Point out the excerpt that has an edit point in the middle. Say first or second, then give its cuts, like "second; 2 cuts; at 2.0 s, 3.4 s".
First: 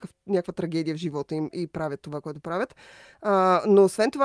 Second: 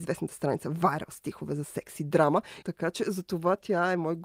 second; 1 cut; at 2.6 s